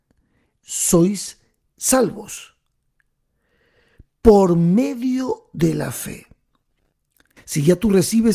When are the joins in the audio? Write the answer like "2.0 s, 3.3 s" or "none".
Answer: 7.4 s

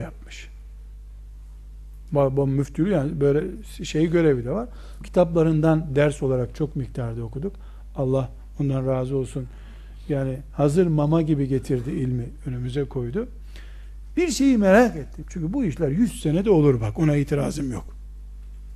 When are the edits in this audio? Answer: 5.0 s, 15.2 s

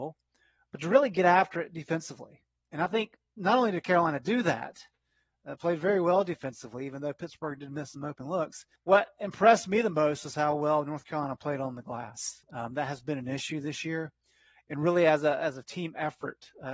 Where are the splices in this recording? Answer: 8.8 s

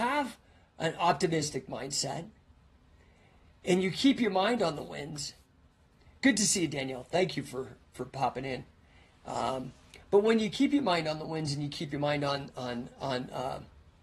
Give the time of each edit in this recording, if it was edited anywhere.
none

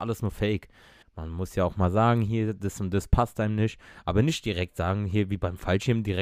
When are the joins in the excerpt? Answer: 1.0 s

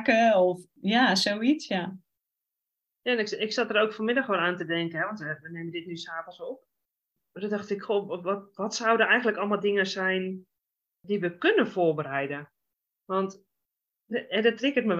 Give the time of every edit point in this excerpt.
none

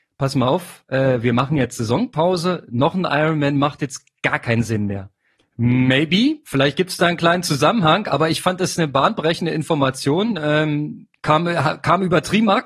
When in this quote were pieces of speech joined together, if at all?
5.4 s, 11.2 s

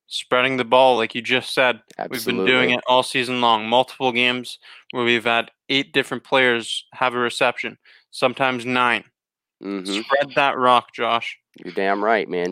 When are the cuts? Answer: none

